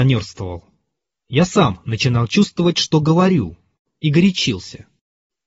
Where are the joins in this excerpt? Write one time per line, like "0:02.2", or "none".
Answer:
none